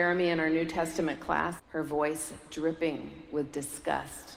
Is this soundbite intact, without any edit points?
no; 1 cut; at 1.6 s

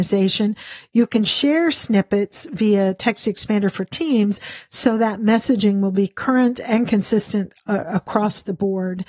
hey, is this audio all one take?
yes; 0 cuts

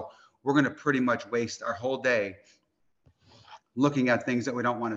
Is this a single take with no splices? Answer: yes; 0 cuts

